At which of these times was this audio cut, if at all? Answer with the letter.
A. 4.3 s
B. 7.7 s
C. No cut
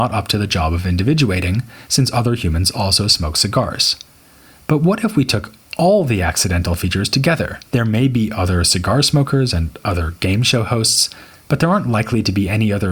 B